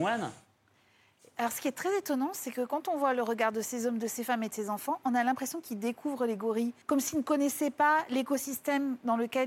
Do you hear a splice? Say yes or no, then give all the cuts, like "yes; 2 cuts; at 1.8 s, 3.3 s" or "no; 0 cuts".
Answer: yes; 1 cut; at 6.8 s